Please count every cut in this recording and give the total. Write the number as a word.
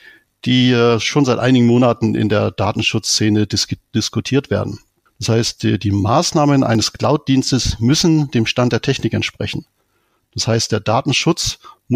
two